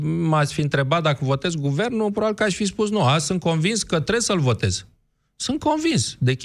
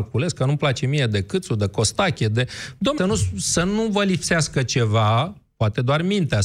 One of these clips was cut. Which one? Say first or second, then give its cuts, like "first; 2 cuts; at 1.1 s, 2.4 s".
second; 1 cut; at 3.0 s